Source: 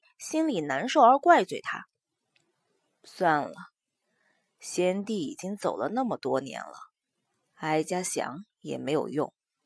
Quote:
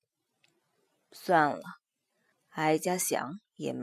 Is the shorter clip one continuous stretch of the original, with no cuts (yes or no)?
no